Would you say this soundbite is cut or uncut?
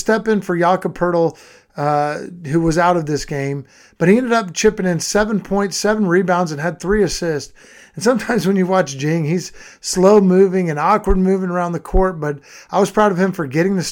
uncut